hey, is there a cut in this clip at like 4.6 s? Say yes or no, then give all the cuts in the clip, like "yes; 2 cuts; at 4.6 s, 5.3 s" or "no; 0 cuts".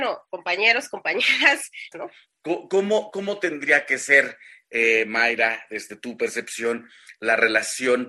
no; 1 cut; at 1.9 s